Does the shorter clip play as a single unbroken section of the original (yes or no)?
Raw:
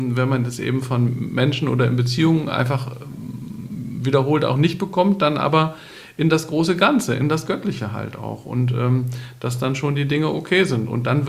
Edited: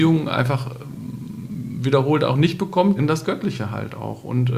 no